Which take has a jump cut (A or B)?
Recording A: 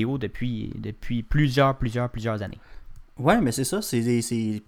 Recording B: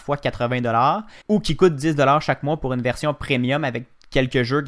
B